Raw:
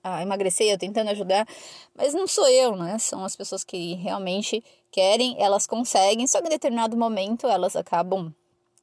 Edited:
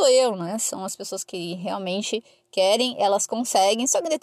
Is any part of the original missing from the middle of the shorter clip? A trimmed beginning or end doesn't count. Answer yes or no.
no